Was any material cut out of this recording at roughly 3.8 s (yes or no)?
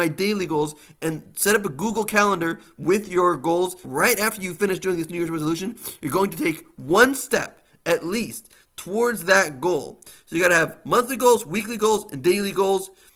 yes